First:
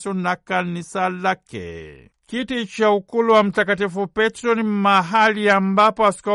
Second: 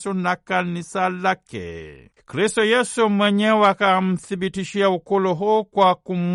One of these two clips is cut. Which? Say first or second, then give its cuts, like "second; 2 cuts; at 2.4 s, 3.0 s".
second; 1 cut; at 2.2 s